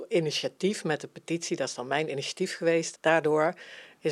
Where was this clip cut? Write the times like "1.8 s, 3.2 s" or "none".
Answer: 2.9 s